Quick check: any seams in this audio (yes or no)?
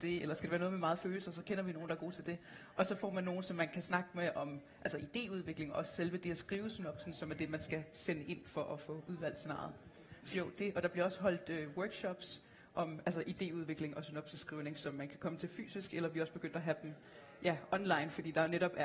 no